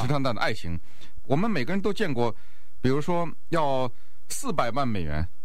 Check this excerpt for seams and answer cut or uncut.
cut